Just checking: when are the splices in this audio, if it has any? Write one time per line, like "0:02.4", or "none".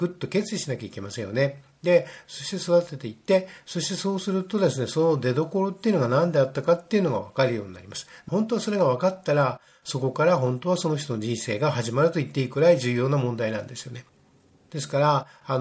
0:08.3